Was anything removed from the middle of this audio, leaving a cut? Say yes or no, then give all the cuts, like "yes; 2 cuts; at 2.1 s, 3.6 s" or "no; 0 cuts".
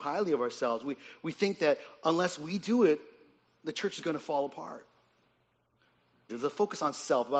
yes; 1 cut; at 6.3 s